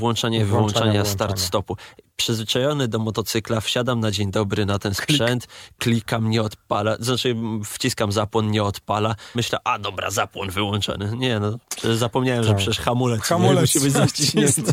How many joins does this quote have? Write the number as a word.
one